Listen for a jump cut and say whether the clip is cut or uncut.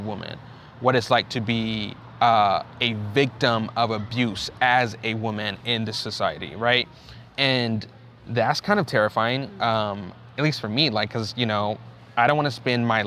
uncut